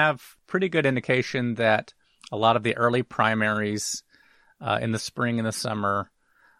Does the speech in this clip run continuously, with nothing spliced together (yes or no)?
yes